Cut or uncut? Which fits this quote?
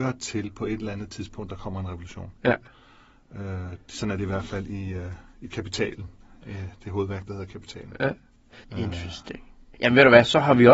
cut